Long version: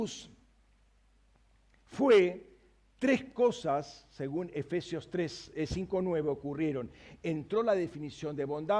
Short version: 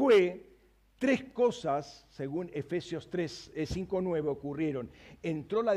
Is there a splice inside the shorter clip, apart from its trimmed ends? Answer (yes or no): no